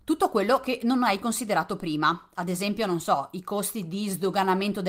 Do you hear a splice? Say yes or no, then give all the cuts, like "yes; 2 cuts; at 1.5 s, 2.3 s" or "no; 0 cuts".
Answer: no; 0 cuts